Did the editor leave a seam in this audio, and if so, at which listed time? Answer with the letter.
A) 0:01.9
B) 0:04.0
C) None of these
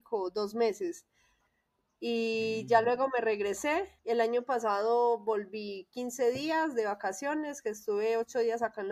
B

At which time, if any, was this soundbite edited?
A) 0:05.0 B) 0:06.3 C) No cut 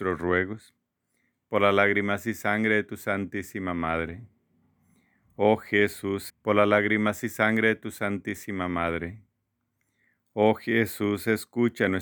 B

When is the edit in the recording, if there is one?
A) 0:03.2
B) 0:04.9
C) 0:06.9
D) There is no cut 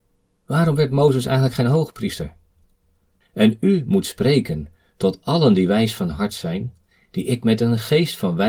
A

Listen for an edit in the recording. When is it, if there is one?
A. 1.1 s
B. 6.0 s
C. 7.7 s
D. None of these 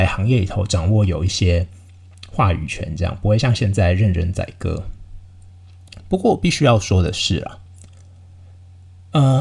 D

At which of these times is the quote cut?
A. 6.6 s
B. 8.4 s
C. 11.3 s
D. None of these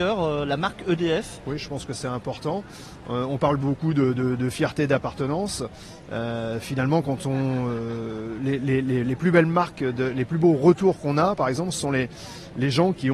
D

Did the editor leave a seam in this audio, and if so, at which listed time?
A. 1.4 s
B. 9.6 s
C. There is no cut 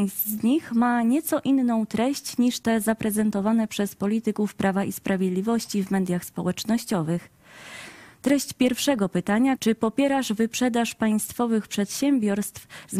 B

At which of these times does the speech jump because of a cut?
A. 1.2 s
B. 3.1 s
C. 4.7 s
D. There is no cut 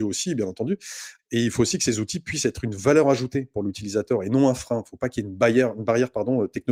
A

